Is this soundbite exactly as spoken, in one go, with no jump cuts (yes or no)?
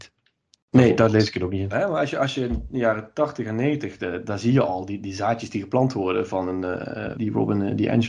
no